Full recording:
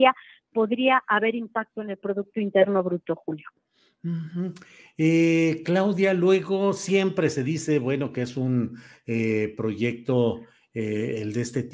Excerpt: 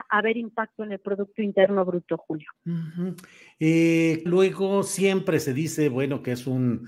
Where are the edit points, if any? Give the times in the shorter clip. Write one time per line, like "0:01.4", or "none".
0:02.6
0:04.3